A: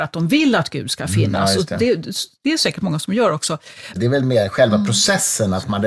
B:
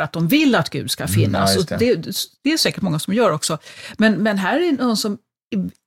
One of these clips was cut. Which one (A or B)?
A